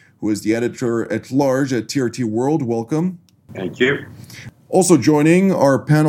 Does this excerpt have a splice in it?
no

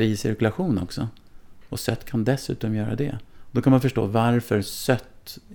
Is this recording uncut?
yes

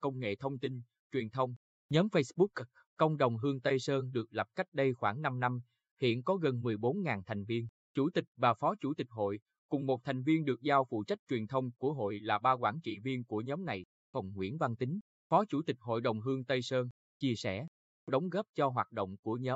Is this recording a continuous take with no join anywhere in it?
no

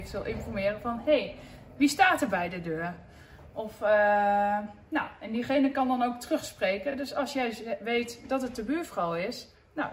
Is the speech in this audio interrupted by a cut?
no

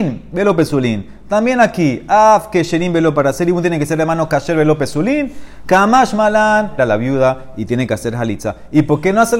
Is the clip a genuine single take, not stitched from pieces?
no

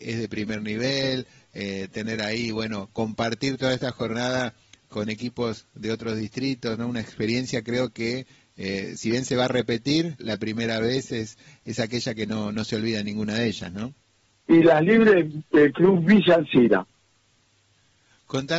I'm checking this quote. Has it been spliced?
yes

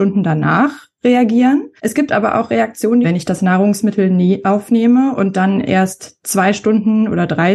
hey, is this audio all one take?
no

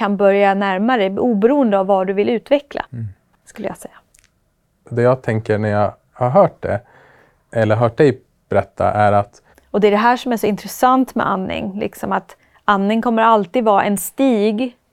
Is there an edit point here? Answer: yes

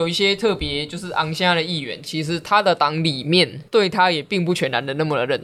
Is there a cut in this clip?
yes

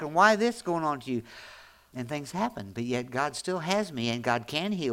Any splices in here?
yes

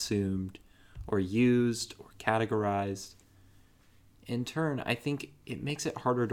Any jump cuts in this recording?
no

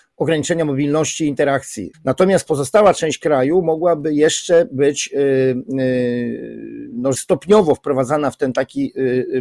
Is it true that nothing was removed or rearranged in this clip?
no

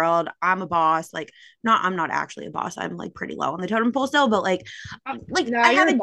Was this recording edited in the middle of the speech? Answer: no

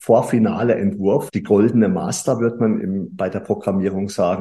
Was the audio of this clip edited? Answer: yes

